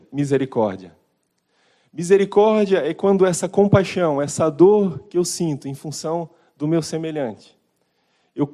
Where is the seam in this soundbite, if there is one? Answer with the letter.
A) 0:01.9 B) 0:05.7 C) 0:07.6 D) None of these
D